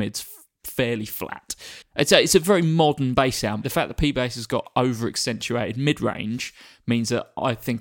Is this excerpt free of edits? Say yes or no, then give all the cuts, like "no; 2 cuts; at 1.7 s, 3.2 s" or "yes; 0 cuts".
no; 2 cuts; at 1.8 s, 3.6 s